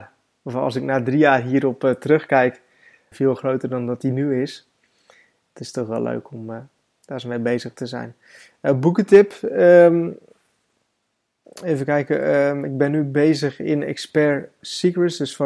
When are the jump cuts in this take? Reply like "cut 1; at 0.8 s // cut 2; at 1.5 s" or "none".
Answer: cut 1; at 3.1 s // cut 2; at 11.4 s